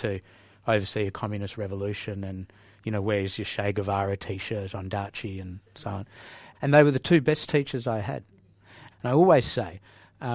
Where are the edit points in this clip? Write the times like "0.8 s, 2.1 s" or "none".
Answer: 6.5 s, 8.9 s